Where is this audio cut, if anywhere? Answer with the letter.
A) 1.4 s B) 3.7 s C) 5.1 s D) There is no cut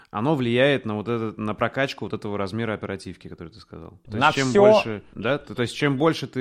C